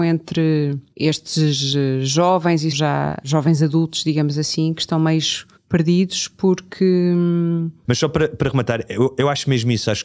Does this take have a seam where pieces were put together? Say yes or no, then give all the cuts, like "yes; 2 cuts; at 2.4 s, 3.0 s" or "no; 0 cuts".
yes; 2 cuts; at 2.7 s, 7.8 s